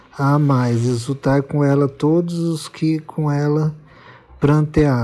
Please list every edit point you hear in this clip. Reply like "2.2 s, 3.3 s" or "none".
none